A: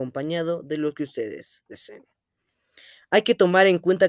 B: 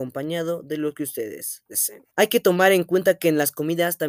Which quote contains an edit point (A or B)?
B